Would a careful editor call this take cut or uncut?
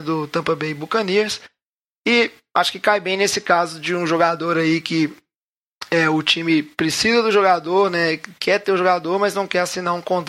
uncut